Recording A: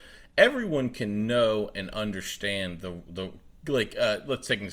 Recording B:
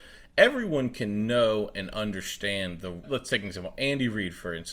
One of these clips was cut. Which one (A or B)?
B